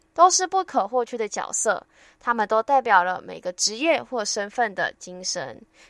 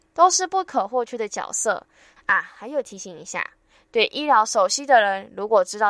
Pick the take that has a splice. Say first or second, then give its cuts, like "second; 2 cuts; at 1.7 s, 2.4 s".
second; 1 cut; at 2.2 s